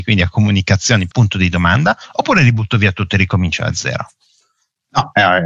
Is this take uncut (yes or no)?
no